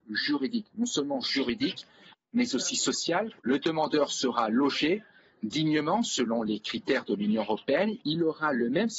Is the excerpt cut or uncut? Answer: cut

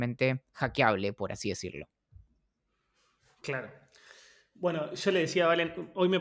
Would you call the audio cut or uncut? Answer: uncut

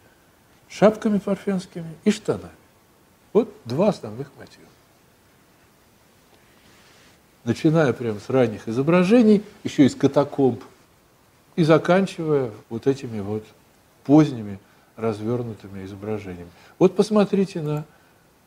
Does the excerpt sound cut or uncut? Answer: cut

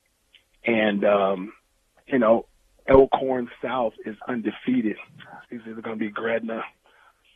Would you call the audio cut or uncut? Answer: cut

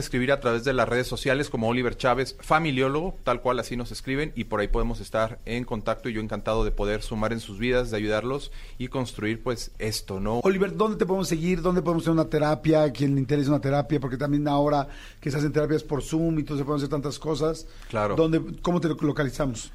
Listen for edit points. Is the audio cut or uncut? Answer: cut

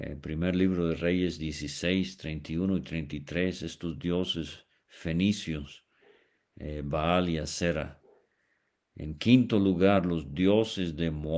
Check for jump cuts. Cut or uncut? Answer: uncut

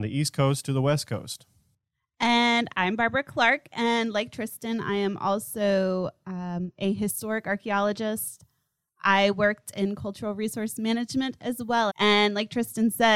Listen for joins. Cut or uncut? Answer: cut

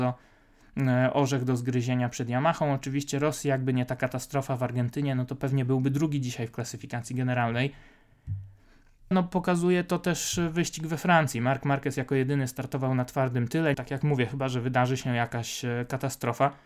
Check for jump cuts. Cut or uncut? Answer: cut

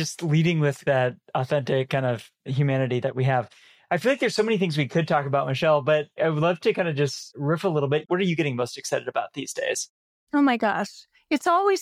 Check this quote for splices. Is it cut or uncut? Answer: uncut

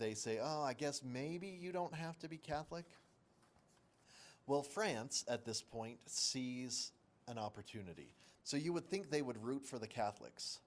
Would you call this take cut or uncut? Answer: cut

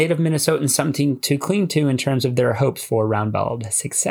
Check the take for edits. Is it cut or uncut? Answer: uncut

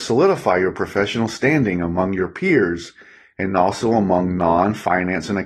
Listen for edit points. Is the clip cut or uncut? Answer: uncut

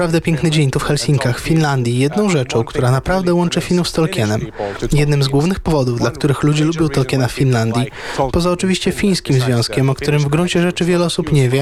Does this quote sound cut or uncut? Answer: uncut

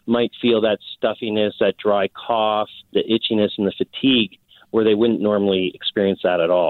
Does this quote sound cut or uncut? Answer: cut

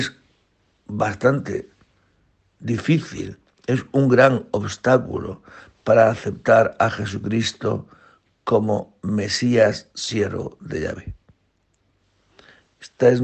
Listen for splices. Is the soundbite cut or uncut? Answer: uncut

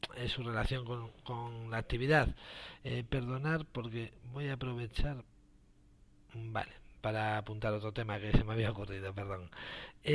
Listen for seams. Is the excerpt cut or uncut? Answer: uncut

